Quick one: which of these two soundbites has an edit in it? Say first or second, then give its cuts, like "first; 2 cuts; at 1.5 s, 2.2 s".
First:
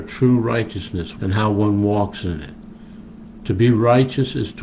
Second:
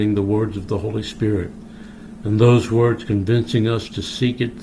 first; 1 cut; at 1.2 s